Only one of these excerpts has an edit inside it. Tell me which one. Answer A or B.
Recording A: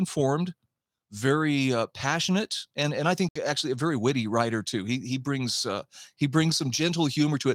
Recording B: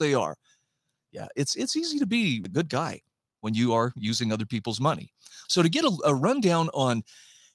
B